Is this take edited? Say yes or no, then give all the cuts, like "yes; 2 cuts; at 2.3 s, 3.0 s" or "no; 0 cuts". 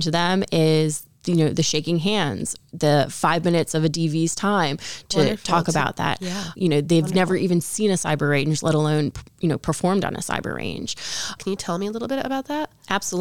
yes; 2 cuts; at 6.5 s, 11.4 s